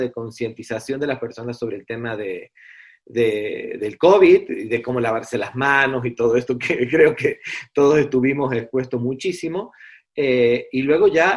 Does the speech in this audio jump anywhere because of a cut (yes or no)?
no